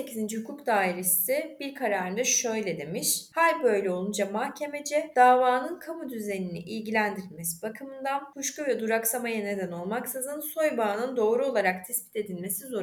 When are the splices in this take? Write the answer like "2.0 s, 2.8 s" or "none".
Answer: 3.3 s